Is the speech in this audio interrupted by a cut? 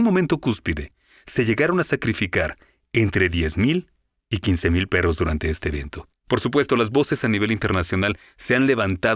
yes; 1 cut; at 6.2 s

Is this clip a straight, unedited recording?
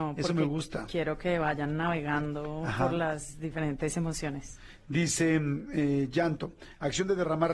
yes; 0 cuts

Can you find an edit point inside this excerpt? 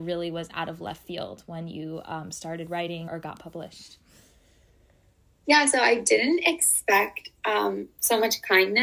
yes; 1 cut; at 3.1 s

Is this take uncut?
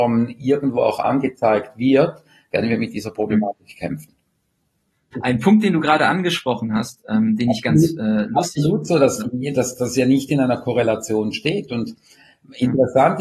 no; 1 cut; at 5.1 s

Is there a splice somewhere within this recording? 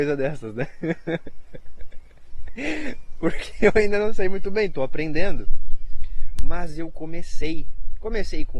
no; 0 cuts

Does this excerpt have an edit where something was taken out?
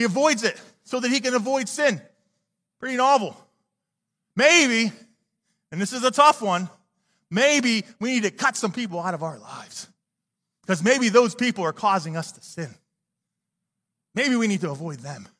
no; 0 cuts

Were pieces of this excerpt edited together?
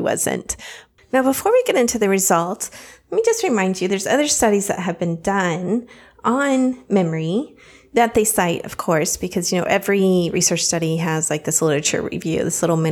yes; 1 cut; at 1.0 s

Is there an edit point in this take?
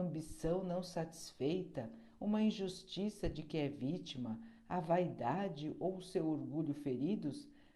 no; 0 cuts

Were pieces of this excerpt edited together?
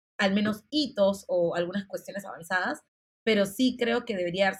no; 0 cuts

